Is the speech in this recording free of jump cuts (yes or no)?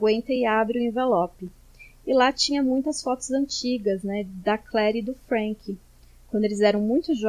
yes